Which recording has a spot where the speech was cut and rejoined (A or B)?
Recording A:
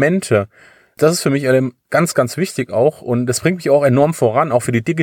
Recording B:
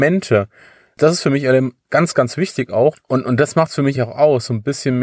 B